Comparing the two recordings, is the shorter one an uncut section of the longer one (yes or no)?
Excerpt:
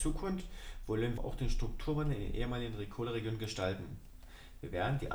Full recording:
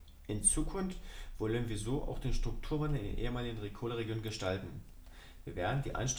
no